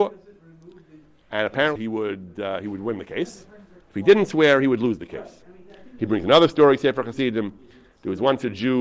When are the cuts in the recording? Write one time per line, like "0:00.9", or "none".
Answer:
0:01.8
0:06.0

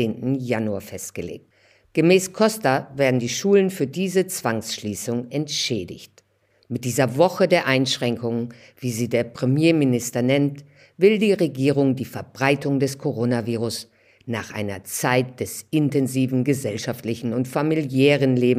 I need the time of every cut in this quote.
none

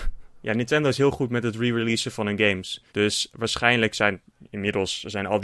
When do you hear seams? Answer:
0:02.9

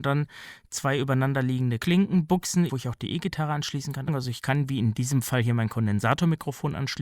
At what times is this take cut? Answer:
0:02.7
0:04.1

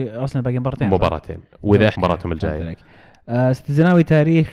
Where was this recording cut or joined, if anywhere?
0:01.9

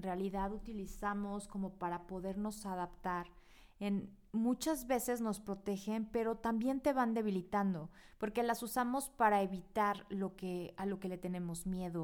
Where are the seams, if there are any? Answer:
none

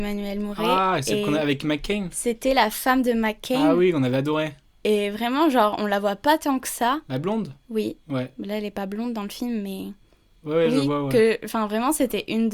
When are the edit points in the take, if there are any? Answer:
none

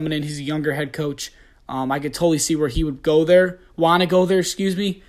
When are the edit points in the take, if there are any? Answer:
none

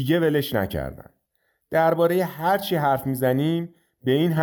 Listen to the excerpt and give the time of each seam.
none

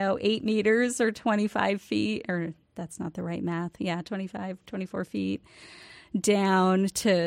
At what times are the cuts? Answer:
none

